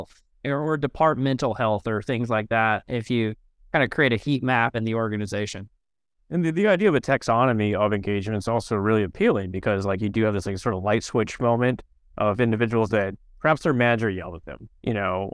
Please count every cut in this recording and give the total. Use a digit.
0